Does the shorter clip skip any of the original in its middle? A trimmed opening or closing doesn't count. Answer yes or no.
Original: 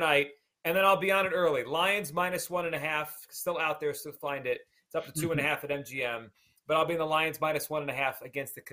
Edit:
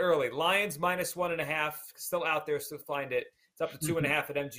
no